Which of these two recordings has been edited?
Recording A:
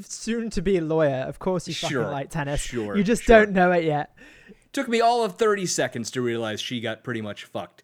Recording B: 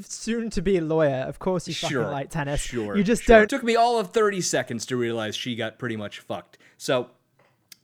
B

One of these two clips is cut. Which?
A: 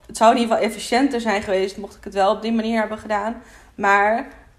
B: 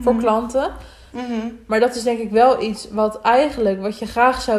B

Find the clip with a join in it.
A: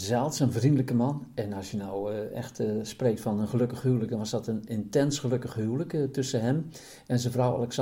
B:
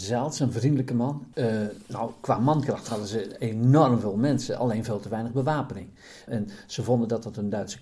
B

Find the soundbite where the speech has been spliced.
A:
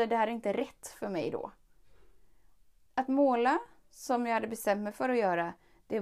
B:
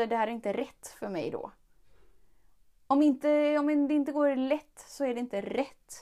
A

